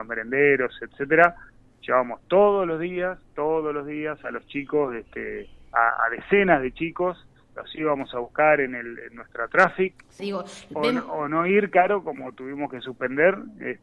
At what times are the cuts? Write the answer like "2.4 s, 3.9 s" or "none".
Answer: 10.2 s